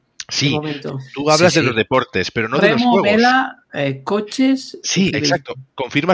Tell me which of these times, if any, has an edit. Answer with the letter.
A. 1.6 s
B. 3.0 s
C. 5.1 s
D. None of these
C